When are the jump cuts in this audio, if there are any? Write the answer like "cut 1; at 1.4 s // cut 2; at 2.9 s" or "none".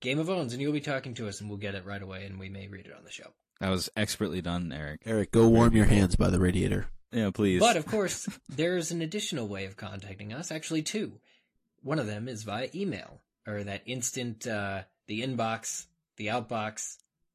cut 1; at 15.0 s